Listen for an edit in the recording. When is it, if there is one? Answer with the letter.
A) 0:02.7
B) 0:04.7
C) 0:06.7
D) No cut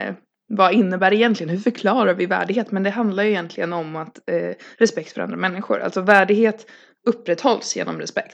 D